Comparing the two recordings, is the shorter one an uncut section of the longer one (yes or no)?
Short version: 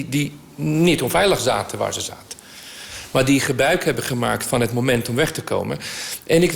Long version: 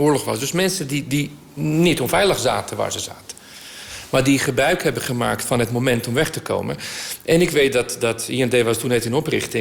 yes